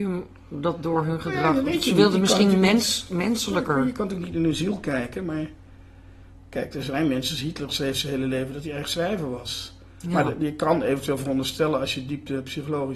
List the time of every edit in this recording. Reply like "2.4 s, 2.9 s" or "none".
none

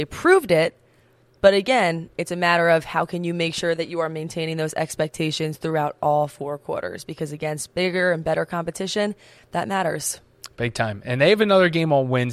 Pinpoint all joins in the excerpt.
none

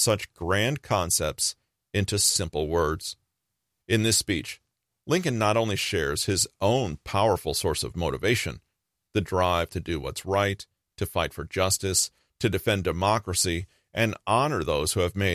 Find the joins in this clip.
3.8 s

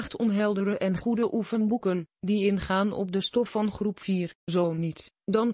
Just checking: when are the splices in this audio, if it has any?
4.4 s

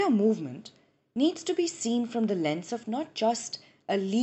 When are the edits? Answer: none

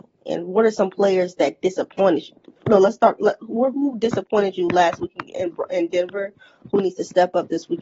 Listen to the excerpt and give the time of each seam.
none

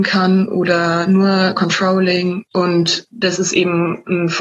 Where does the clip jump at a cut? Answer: 2.5 s

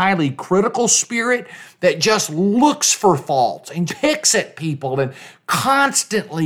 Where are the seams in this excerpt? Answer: 3.9 s

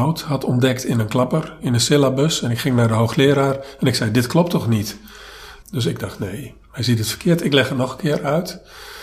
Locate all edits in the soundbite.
5.6 s

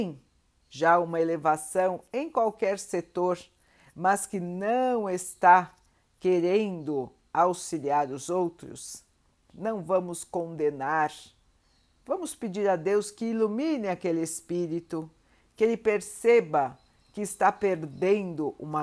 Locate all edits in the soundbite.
9.5 s

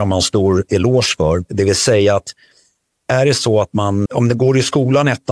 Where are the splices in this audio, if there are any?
1.4 s, 4.1 s

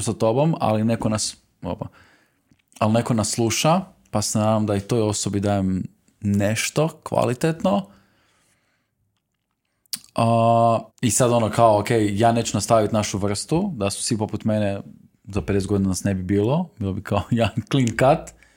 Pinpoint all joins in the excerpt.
10.9 s

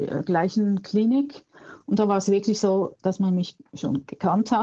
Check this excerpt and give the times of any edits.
1.8 s

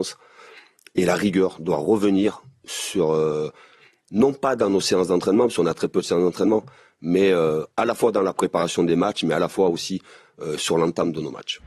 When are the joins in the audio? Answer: none

